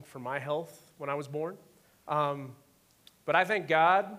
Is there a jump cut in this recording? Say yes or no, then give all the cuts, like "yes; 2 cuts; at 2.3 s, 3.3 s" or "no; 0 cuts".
yes; 1 cut; at 1.9 s